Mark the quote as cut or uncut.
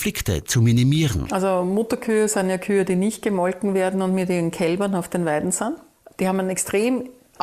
cut